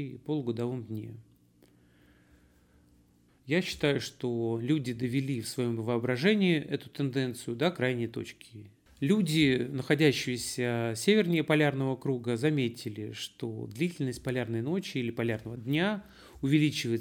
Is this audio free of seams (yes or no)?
no